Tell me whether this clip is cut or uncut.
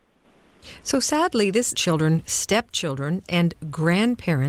cut